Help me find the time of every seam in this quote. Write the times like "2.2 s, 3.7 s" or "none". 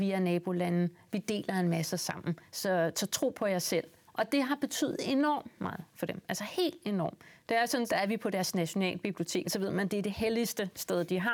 4.1 s, 7.9 s, 9.4 s